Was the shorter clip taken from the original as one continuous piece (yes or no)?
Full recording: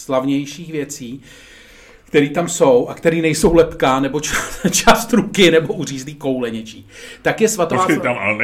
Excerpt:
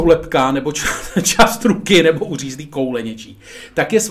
yes